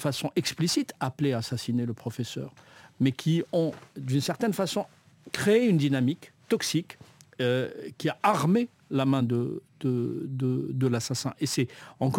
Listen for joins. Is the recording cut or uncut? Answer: uncut